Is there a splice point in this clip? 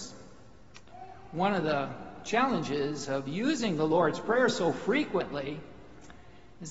no; 0 cuts

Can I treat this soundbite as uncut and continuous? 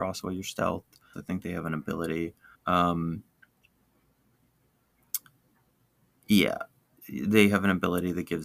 no; 2 cuts; at 1.1 s, 2.5 s

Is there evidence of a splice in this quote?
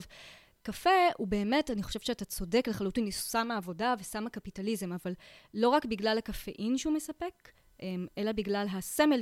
no; 0 cuts

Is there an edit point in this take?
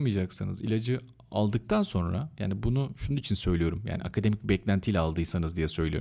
no; 0 cuts

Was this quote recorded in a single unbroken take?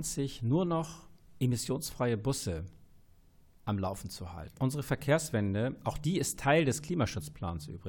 no; 1 cut; at 4.5 s

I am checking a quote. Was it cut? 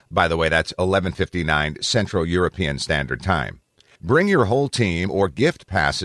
yes; 1 cut; at 3.9 s

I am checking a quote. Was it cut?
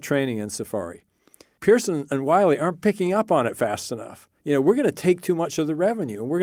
no; 0 cuts

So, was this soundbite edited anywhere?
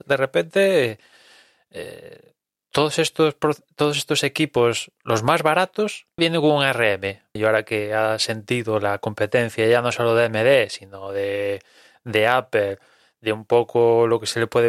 yes; 2 cuts; at 6.2 s, 7.4 s

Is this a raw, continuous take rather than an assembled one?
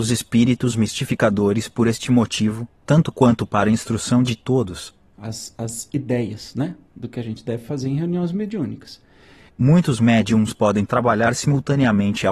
no; 2 cuts; at 5.1 s, 9.5 s

